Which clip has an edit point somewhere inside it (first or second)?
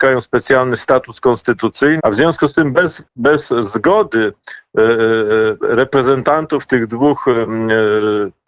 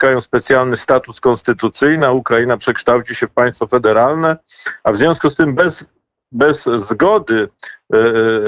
first